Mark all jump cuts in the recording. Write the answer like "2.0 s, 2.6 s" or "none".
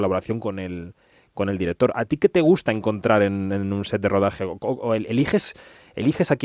none